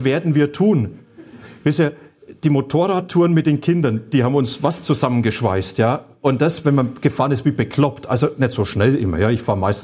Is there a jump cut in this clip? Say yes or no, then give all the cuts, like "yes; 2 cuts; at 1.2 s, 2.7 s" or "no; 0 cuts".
no; 0 cuts